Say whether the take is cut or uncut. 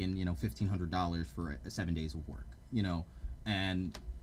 uncut